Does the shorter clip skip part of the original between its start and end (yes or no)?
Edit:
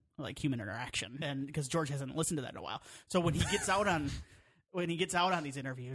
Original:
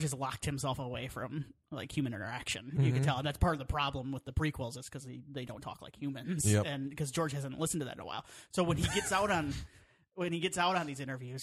yes